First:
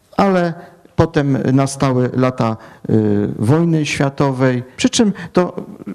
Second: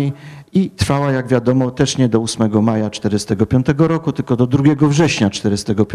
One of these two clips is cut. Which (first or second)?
first